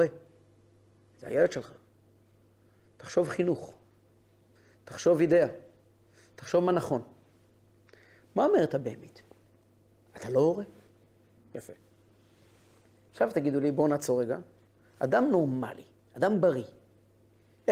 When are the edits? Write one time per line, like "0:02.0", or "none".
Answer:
0:11.4